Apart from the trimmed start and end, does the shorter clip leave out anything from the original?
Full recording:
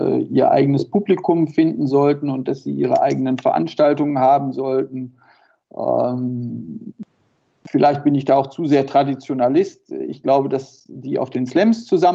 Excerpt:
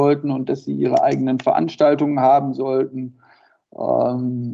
no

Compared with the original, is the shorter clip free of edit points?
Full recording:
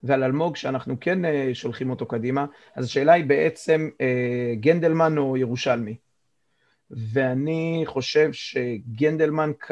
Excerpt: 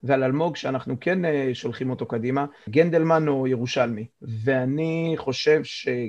no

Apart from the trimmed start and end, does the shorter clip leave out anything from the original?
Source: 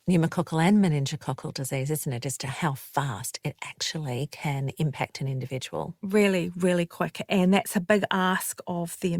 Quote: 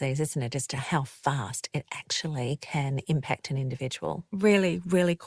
no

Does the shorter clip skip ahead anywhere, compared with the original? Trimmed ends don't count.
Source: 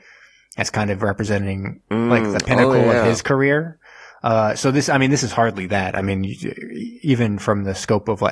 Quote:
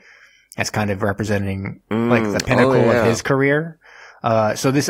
no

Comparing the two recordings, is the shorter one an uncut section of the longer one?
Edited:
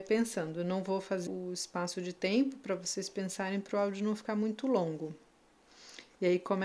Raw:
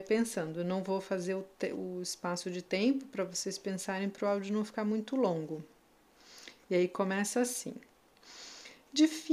no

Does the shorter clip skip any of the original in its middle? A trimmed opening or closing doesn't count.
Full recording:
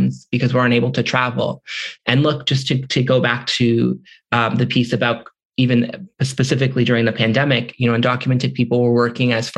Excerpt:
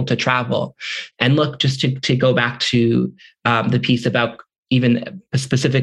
no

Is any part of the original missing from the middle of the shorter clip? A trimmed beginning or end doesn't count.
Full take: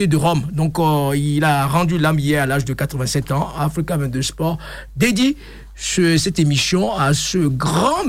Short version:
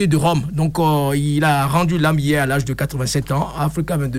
no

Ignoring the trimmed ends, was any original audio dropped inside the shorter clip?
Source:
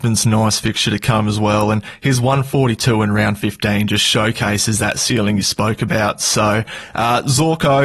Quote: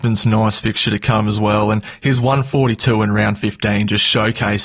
no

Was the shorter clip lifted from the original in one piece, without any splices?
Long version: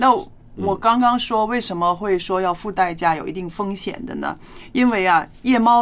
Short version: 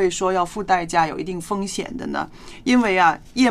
yes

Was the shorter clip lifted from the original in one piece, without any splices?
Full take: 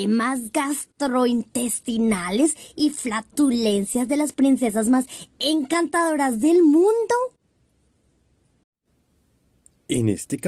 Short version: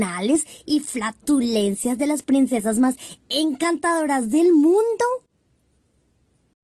yes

